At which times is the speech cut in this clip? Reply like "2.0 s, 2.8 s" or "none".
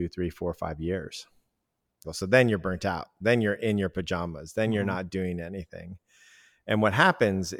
2.0 s